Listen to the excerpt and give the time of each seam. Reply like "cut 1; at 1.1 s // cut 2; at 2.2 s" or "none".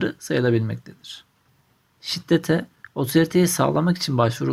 cut 1; at 1.8 s